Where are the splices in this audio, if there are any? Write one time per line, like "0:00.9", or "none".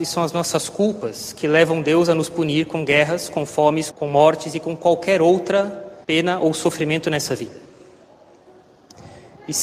0:03.9
0:06.0